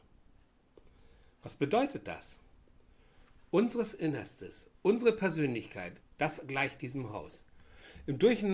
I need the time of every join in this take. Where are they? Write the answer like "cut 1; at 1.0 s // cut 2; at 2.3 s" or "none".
cut 1; at 6.0 s